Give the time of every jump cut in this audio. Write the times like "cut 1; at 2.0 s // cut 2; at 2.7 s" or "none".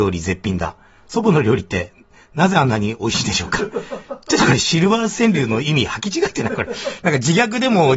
none